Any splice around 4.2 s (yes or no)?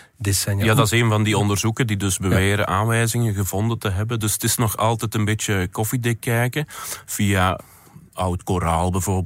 yes